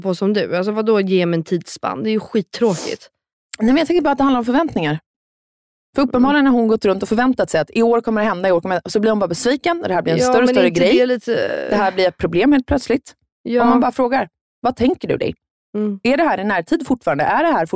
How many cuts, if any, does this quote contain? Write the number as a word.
zero